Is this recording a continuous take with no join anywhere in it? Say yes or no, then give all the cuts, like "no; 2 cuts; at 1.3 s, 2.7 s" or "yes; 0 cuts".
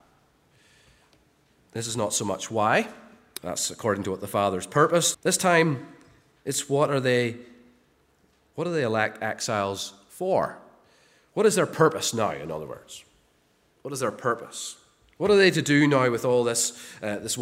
no; 2 cuts; at 3.4 s, 5.1 s